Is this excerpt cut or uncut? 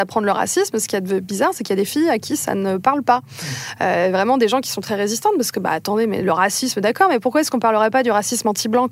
uncut